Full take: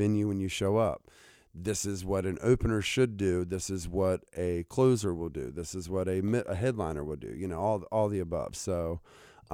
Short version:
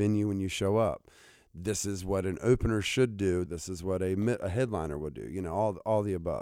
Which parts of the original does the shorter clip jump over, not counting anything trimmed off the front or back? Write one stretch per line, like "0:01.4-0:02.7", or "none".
0:03.5-0:05.5